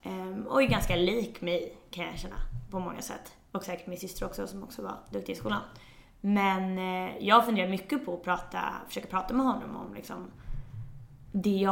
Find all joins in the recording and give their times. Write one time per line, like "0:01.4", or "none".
none

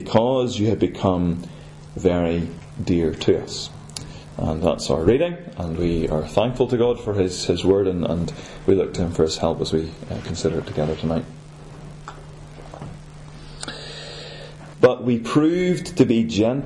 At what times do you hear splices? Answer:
0:14.7

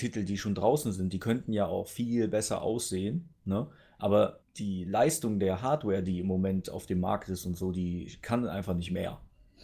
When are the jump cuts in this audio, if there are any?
0:04.4

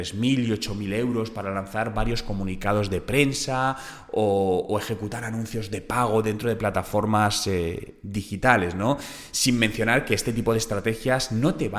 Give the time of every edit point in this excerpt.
none

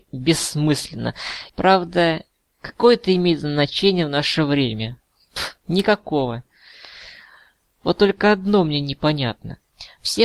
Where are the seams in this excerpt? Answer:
0:01.5

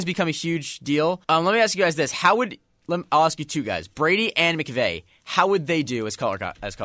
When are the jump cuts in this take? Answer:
0:01.2

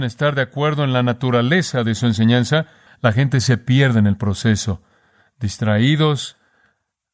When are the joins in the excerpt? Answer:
0:02.9

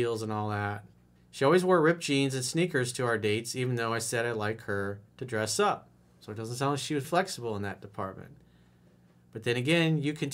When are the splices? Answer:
0:01.2
0:05.1
0:07.0

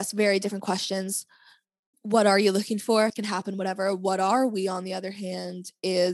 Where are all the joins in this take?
none

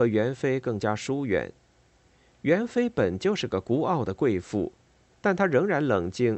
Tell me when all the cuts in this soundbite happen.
0:05.1

